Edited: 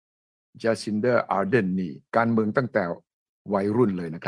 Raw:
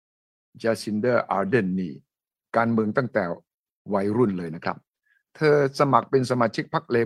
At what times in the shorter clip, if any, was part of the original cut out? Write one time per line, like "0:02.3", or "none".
0:02.1